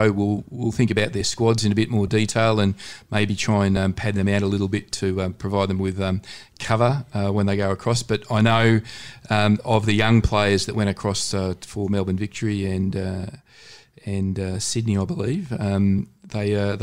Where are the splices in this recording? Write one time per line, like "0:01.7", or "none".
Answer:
none